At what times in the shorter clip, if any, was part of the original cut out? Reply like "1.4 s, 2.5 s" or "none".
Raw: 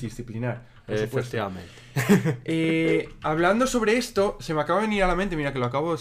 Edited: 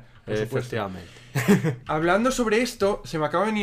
1.8 s